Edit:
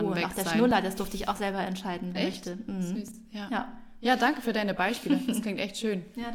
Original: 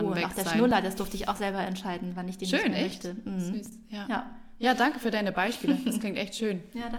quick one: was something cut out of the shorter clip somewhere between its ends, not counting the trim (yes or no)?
yes